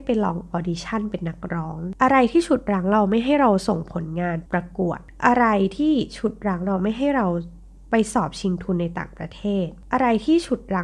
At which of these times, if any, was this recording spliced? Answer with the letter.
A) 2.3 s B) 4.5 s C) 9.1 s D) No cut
B